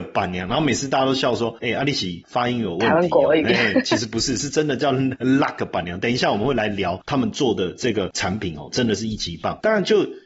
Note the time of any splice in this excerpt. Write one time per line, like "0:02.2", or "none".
none